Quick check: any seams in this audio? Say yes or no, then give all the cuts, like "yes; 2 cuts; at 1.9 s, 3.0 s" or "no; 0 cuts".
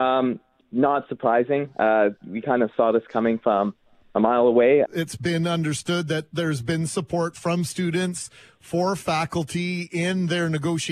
yes; 1 cut; at 4.8 s